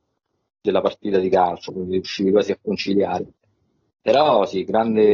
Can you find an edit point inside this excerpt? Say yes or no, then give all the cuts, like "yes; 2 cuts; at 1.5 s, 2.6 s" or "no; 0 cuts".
no; 0 cuts